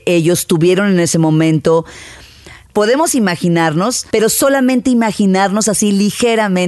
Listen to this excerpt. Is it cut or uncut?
cut